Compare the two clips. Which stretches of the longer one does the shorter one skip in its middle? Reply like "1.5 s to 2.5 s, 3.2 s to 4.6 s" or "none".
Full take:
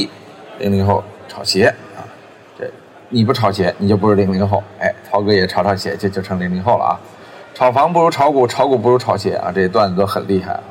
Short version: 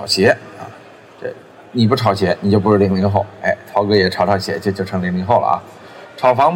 none